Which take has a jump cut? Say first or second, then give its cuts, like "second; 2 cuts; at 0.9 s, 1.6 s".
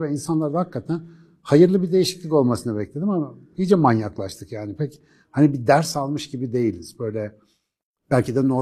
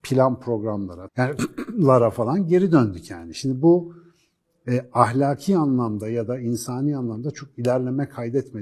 second; 1 cut; at 1.1 s